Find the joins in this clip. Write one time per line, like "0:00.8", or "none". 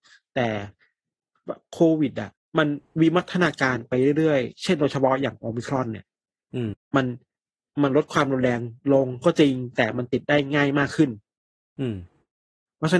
0:06.7